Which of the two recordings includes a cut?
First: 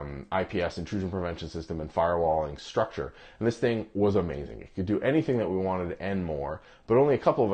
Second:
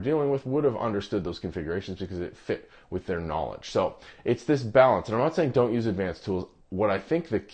second; 1 cut; at 6.6 s

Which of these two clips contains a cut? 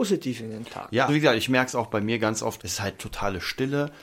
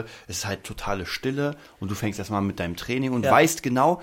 first; 2 cuts; at 1.1 s, 2.6 s

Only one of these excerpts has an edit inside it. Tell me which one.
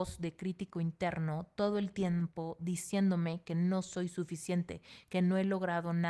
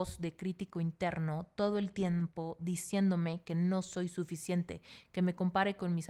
second; 1 cut; at 5.0 s

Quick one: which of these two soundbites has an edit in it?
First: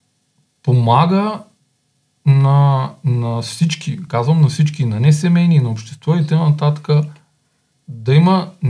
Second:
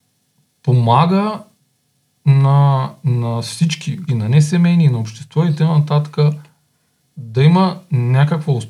second; 1 cut; at 4.1 s

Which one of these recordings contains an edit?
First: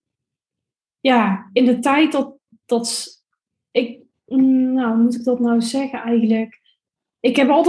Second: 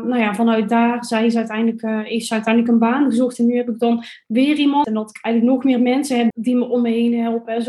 second; 2 cuts; at 4.8 s, 6.3 s

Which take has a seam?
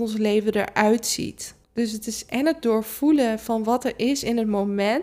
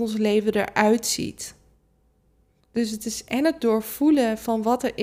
first; 1 cut; at 1.6 s

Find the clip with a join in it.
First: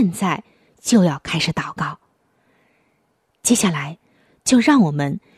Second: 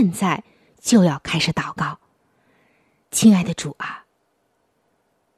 second; 1 cut; at 3.0 s

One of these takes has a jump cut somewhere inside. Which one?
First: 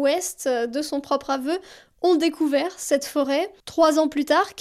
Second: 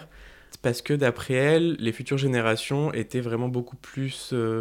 first; 1 cut; at 3.6 s

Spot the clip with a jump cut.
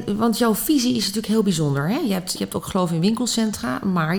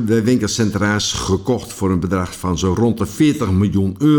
first; 1 cut; at 2.4 s

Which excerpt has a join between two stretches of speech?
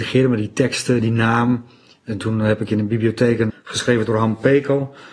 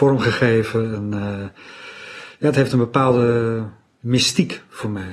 first; 2 cuts; at 1.0 s, 3.5 s

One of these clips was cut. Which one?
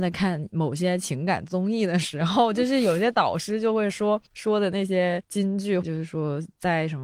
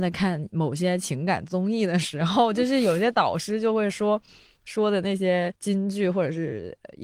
first; 2 cuts; at 4.3 s, 5.8 s

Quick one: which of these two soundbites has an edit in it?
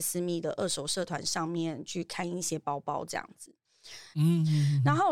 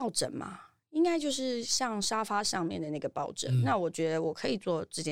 first; 1 cut; at 4.1 s

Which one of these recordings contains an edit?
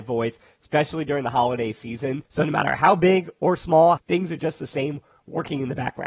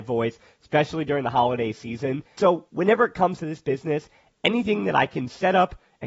first; 2 cuts; at 2.3 s, 4.0 s

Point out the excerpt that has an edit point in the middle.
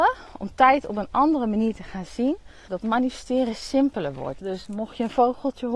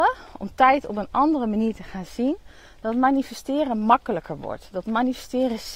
first; 2 cuts; at 2.7 s, 4.4 s

